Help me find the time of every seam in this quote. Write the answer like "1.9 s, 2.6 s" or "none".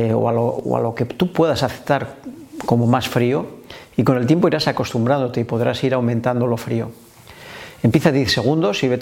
none